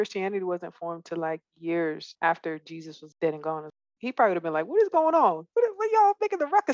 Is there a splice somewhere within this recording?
no; 0 cuts

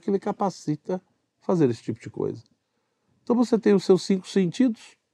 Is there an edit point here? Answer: no; 0 cuts

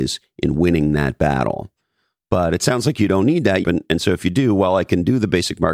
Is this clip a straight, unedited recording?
no; 1 cut; at 3.6 s

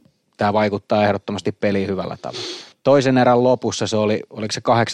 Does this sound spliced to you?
yes; 1 cut; at 2.7 s

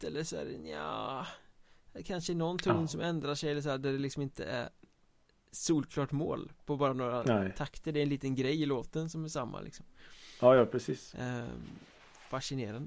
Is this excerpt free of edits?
yes; 0 cuts

